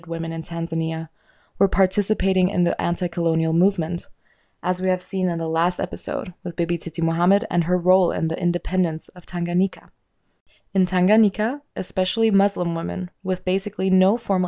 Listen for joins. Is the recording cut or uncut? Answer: uncut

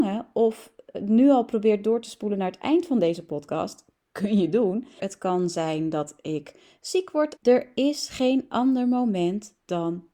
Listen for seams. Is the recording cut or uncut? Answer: cut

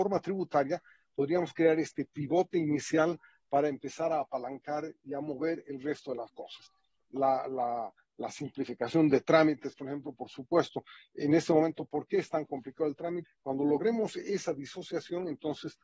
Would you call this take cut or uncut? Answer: cut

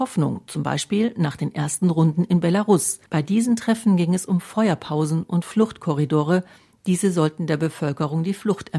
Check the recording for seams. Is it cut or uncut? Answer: cut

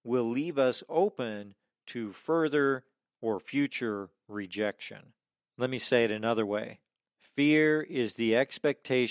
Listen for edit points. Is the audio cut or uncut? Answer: uncut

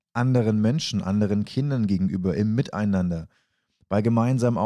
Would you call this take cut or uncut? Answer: uncut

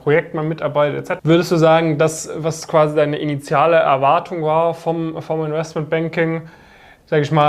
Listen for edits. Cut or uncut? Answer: cut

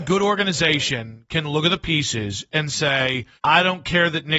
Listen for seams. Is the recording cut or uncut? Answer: cut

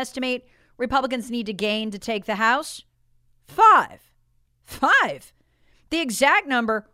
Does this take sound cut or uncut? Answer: cut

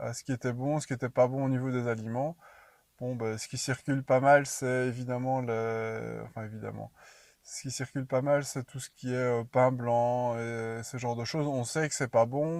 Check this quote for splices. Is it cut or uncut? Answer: uncut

